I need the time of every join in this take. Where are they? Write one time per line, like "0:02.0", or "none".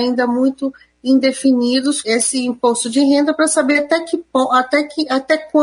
0:02.0